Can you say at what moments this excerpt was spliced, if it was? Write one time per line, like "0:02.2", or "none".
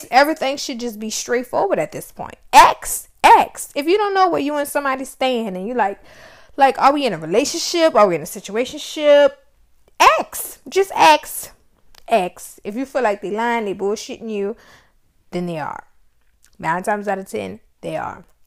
none

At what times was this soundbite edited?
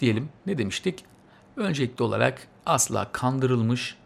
none

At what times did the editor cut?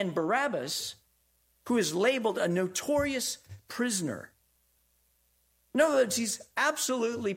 none

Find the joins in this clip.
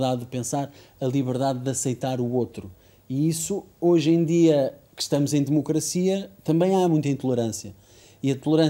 none

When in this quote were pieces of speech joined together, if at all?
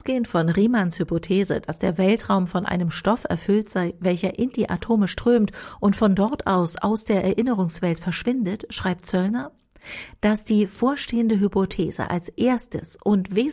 none

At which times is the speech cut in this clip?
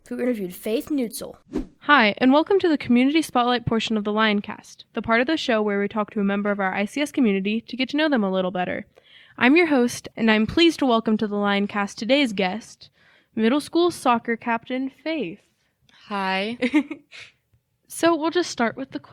0:10.1

